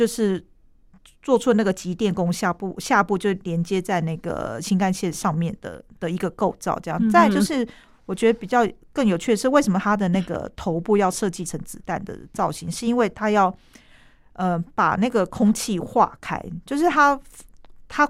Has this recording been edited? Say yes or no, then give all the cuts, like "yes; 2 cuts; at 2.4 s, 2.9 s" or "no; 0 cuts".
no; 0 cuts